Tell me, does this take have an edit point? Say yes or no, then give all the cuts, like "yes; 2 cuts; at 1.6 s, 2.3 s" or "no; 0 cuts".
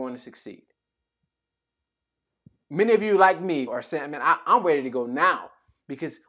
no; 0 cuts